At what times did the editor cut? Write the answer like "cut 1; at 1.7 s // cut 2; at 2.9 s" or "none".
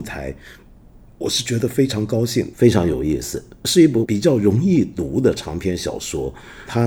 cut 1; at 2.5 s

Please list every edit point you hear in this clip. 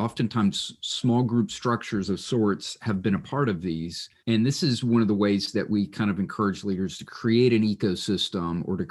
cut 1; at 4.2 s

